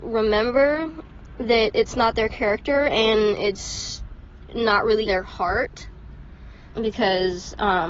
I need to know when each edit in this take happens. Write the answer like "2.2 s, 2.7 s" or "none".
5.1 s, 6.7 s